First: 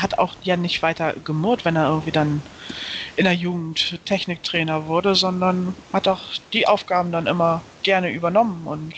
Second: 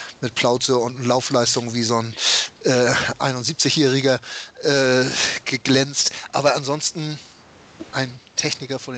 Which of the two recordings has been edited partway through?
first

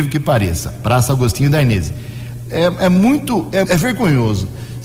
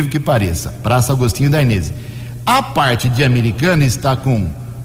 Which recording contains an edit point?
first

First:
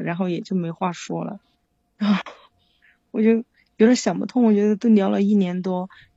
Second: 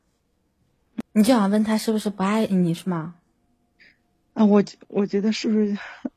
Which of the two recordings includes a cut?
second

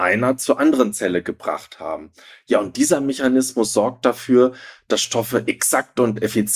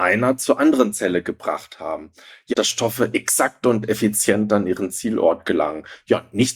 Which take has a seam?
second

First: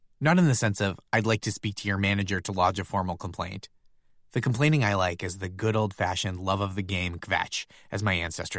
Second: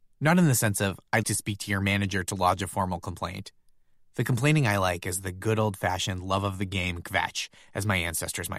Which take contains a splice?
second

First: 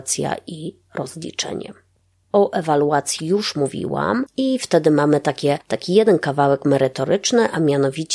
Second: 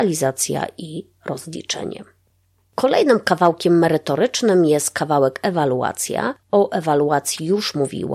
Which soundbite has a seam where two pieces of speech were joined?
first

